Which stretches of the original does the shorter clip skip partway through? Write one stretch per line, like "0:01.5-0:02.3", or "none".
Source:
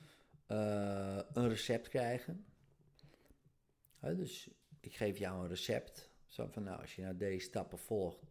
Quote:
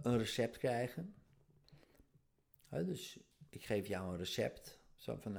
none